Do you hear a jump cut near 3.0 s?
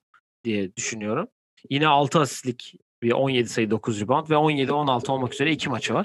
no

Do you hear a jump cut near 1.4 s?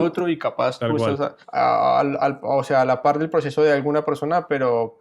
yes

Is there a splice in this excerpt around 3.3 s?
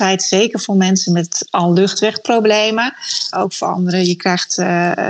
yes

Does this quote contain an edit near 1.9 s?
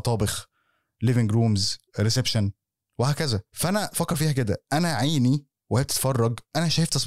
yes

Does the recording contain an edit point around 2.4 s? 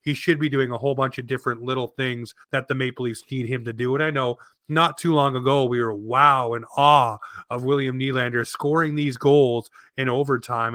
yes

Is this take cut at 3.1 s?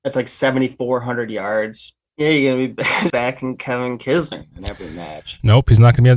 yes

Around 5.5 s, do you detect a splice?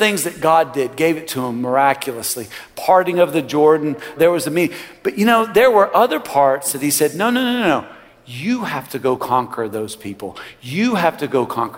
no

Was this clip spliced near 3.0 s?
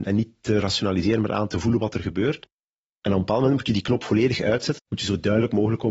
no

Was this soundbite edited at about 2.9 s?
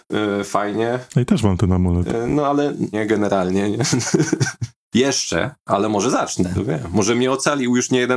yes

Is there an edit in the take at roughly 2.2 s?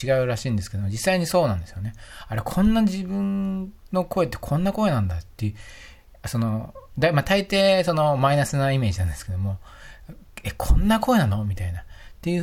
no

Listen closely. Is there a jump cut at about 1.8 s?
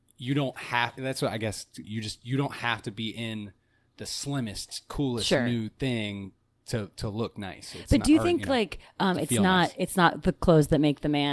yes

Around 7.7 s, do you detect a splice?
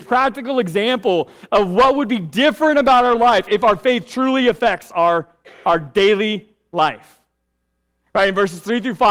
no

